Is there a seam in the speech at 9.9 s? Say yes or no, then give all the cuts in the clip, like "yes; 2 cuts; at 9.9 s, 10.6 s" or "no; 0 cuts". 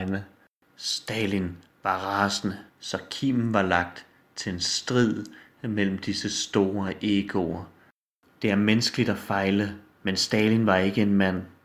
no; 1 cut; at 2.7 s